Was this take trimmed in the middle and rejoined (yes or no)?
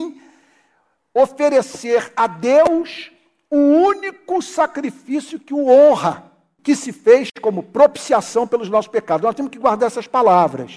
yes